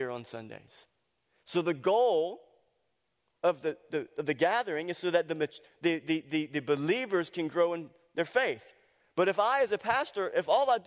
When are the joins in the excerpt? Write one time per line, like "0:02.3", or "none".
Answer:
none

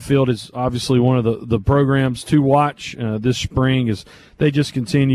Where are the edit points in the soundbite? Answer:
none

